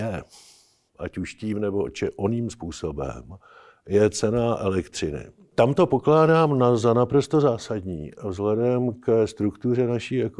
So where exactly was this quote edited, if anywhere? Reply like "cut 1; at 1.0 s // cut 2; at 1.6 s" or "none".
none